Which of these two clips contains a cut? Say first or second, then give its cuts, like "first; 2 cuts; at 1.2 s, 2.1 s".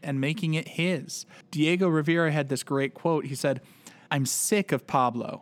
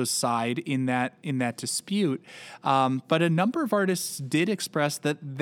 first; 1 cut; at 4.1 s